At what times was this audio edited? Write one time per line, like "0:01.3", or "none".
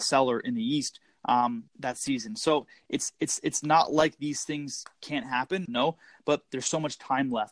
0:01.7
0:05.7